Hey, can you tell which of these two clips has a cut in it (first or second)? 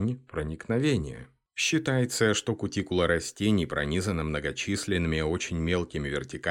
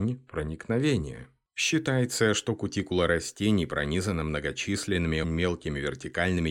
second